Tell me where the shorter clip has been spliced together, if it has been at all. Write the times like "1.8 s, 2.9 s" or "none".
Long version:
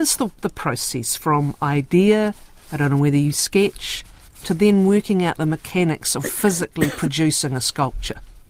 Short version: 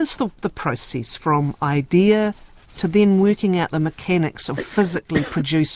2.6 s